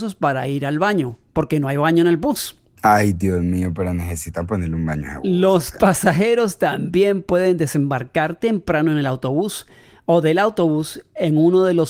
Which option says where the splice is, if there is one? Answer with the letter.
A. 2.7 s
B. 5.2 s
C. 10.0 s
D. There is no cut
A